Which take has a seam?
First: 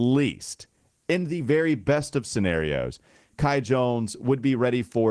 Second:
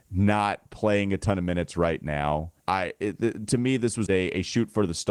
second; 2 cuts; at 2.6 s, 4.1 s

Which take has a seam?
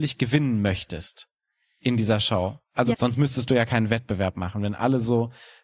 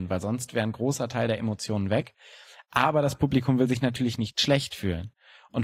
first; 1 cut; at 2.9 s

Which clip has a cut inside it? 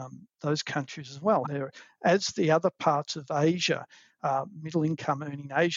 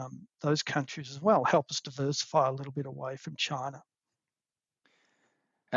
first; 1 cut; at 1.4 s

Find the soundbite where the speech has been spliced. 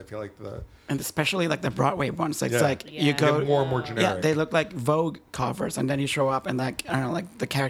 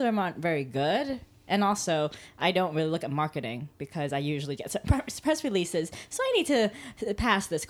second; 1 cut; at 4.6 s

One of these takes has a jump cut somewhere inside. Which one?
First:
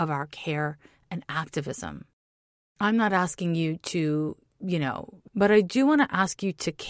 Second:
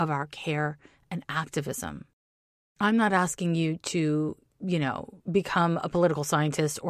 first; 1 cut; at 5.3 s

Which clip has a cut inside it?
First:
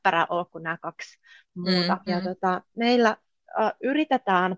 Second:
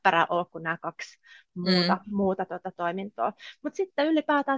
first; 1 cut; at 2.1 s

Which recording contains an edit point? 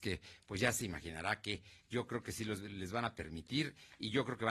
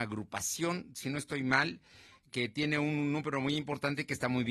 second; 1 cut; at 2.3 s

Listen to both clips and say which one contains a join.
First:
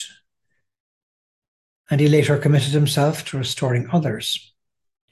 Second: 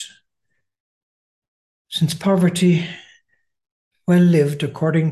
first; 1 cut; at 1.8 s

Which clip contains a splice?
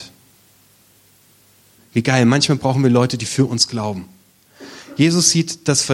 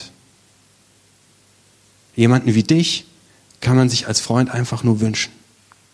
first; 1 cut; at 1.8 s

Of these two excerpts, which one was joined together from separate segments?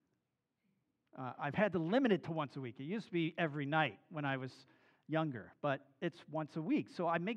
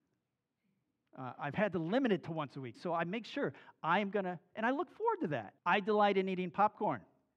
second; 2 cuts; at 2.7 s, 5.6 s

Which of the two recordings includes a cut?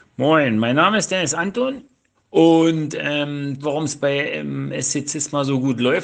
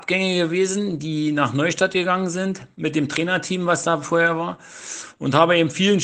first; 2 cuts; at 2.1 s, 3.6 s

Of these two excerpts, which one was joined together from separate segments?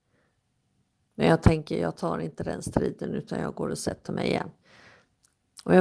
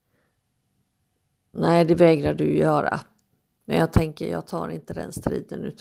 first; 1 cut; at 1.1 s

